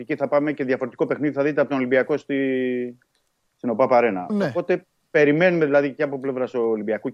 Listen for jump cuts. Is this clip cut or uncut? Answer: uncut